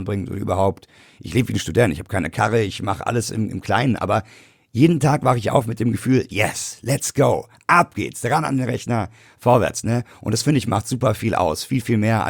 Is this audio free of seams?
yes; 0 cuts

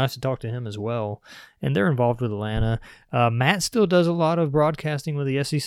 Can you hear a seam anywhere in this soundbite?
no; 0 cuts

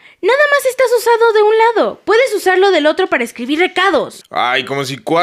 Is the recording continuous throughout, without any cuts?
no; 1 cut; at 4.2 s

